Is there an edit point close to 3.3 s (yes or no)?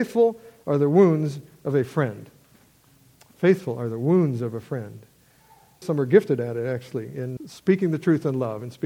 no